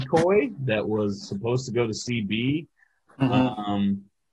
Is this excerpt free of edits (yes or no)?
yes